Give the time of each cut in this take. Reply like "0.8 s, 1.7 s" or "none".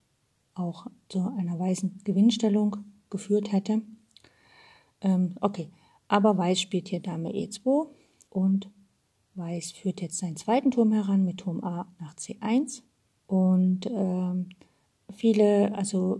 8.3 s, 13.1 s